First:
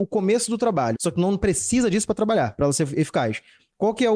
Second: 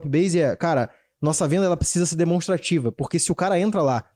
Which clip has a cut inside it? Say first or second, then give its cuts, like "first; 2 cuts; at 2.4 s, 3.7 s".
first; 1 cut; at 1.0 s